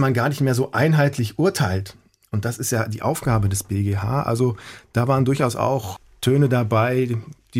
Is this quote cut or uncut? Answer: uncut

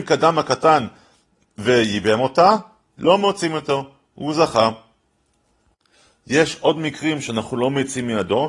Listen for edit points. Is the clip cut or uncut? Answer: uncut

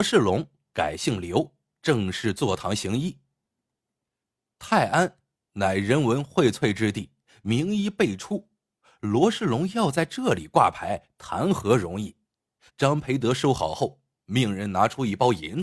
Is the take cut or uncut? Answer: cut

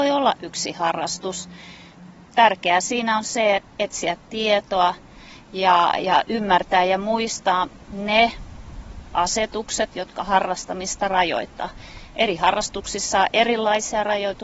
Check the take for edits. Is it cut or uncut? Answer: cut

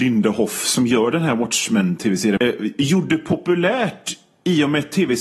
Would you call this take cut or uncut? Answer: cut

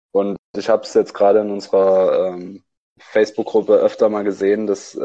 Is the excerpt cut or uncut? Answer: uncut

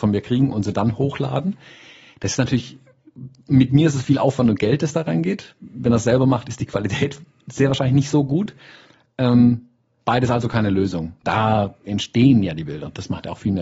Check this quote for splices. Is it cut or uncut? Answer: cut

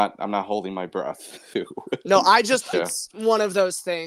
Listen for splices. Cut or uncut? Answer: cut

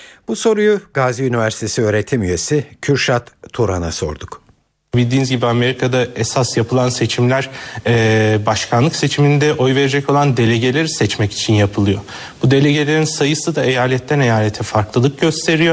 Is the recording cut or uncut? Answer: uncut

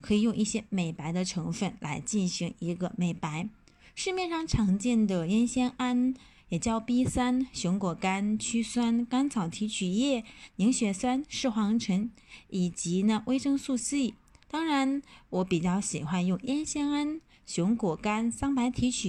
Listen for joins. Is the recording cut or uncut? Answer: cut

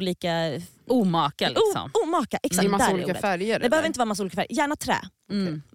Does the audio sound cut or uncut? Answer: uncut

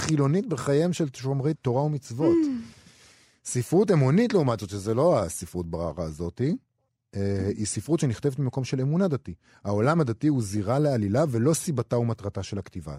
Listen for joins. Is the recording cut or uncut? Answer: cut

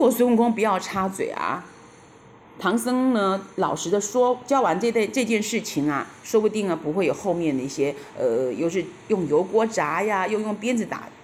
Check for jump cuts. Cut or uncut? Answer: uncut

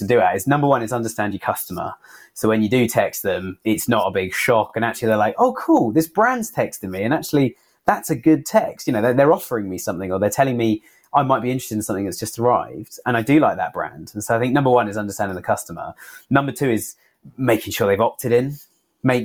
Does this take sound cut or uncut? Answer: uncut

